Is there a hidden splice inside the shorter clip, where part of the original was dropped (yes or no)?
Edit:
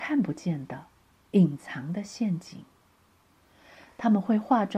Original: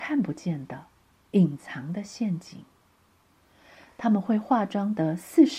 no